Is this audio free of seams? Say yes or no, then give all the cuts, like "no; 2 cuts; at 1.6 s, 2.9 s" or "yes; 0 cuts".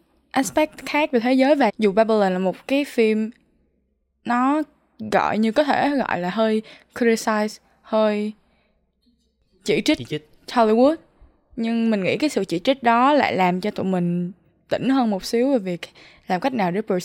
no; 1 cut; at 1.7 s